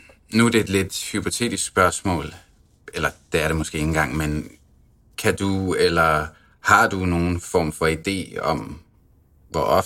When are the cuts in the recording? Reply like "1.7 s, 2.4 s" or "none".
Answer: none